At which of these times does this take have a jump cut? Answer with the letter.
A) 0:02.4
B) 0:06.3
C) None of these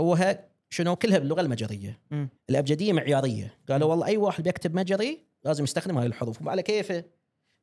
A